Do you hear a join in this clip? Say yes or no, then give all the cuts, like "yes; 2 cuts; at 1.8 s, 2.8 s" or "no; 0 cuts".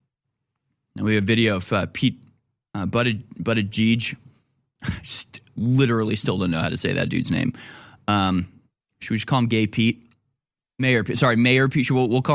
no; 0 cuts